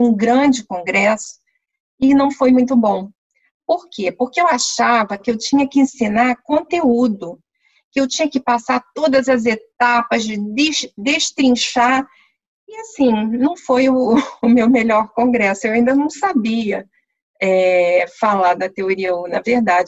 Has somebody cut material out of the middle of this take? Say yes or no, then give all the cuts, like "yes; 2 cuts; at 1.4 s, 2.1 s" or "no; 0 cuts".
no; 0 cuts